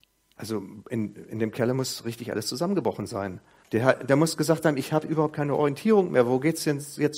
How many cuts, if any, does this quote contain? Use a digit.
1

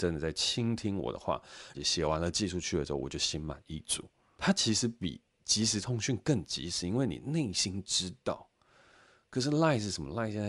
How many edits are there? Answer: 1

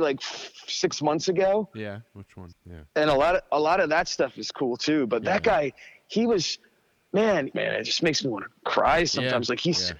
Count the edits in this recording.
2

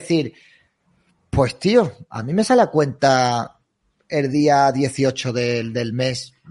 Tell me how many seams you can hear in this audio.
0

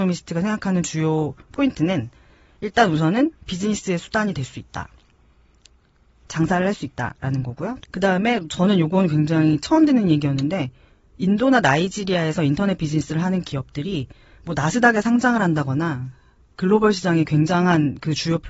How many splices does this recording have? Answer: 1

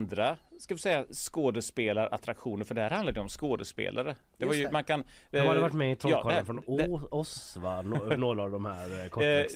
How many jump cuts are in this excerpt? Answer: 0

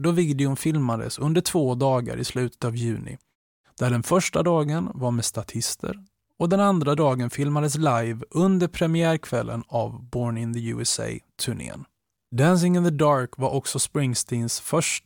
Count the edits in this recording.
1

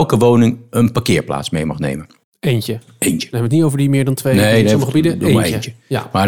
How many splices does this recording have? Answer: 0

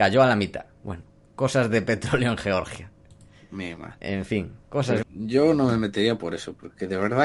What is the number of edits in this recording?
1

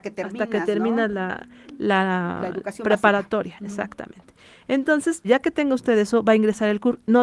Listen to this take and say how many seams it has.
1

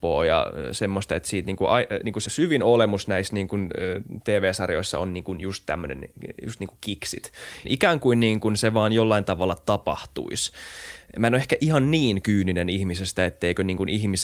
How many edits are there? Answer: 2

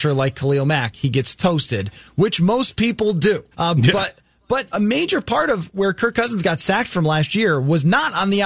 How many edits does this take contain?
2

